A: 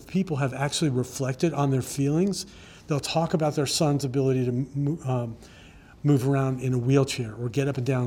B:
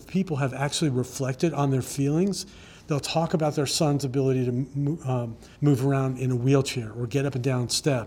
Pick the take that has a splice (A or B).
B